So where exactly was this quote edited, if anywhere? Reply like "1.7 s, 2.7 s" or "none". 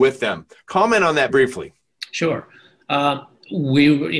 1.3 s